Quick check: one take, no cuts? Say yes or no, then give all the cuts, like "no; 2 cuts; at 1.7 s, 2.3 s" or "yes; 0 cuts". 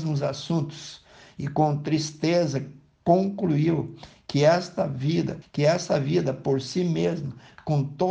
no; 1 cut; at 5.4 s